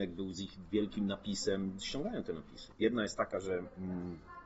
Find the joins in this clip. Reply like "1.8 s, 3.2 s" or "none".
2.7 s